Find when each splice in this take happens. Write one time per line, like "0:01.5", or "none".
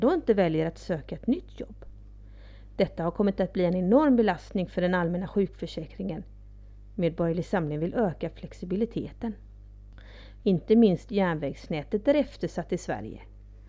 0:10.4